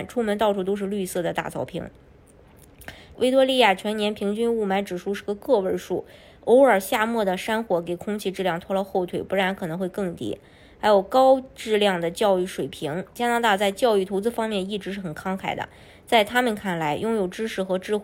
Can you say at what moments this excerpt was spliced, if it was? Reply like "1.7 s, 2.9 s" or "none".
3.1 s